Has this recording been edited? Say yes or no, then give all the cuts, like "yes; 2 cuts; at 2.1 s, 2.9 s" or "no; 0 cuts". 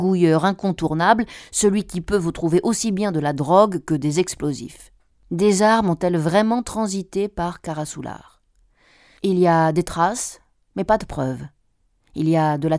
no; 0 cuts